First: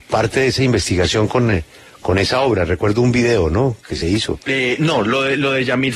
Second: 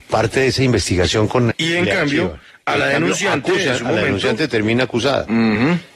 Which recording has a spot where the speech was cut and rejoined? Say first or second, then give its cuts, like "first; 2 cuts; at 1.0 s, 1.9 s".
second; 1 cut; at 1.5 s